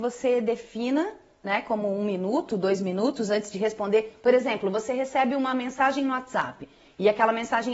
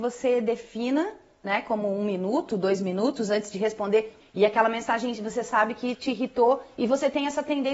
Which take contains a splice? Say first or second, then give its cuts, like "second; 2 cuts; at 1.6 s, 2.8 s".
second; 1 cut; at 4.2 s